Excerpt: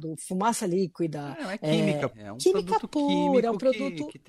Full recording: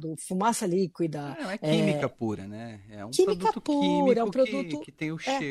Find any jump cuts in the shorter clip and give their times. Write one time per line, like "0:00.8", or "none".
0:02.1